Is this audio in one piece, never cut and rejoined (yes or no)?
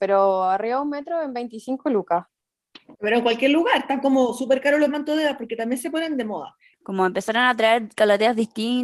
no